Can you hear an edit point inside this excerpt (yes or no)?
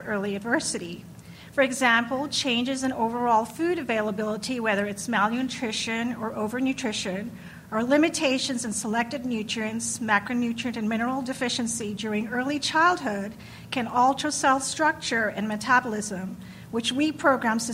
no